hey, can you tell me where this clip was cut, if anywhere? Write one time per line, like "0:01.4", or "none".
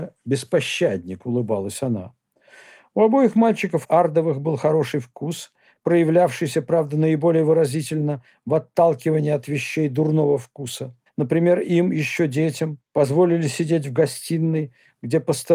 0:11.1